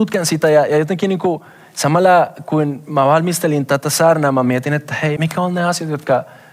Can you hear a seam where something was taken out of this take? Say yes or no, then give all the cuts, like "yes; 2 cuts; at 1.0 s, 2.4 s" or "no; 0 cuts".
yes; 1 cut; at 5.2 s